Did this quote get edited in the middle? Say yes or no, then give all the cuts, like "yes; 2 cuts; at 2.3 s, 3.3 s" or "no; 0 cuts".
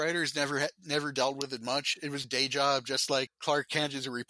yes; 2 cuts; at 2.2 s, 3.3 s